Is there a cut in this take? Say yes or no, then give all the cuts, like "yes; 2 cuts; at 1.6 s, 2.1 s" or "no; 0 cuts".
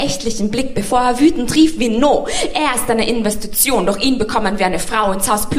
no; 0 cuts